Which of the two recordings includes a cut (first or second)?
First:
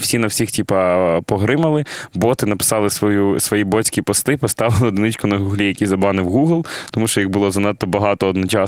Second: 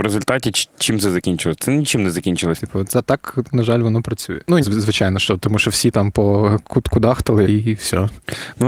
second